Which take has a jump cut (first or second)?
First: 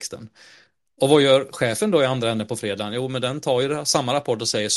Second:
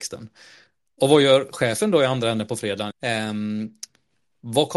second